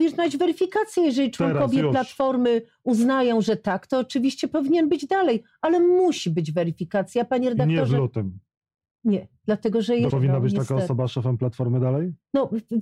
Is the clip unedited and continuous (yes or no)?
no